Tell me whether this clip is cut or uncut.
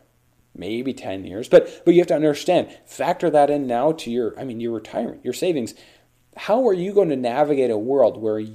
uncut